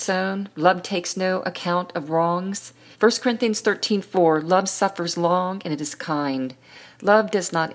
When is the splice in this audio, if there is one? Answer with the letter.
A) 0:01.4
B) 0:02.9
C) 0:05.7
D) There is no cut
B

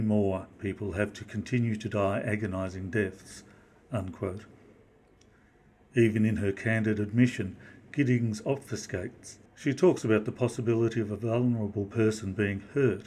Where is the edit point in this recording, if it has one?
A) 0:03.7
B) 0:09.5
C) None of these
B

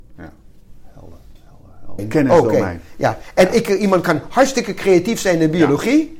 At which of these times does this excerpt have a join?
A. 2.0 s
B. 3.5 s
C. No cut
A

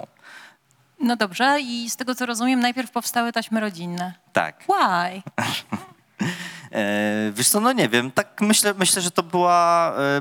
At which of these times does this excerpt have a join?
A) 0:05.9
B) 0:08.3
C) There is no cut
C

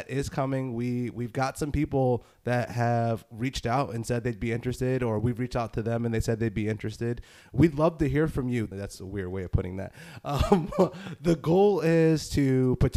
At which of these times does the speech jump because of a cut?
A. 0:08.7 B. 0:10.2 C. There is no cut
A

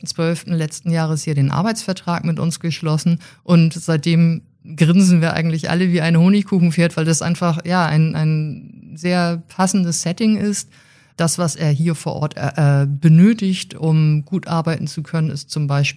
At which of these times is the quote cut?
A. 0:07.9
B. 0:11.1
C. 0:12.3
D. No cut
B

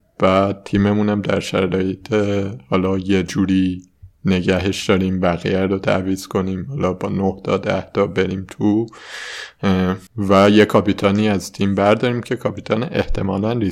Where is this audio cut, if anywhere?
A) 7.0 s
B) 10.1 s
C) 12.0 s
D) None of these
B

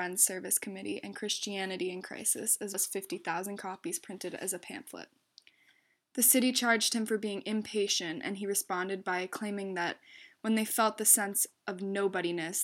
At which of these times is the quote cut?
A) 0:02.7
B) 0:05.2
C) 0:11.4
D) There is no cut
A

